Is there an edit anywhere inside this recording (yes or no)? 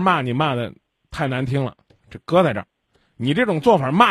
yes